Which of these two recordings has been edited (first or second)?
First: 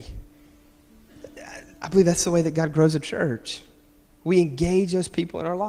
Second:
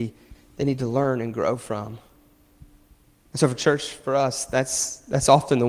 second